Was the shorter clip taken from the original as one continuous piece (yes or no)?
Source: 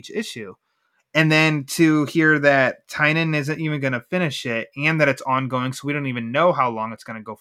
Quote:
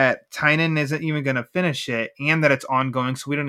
yes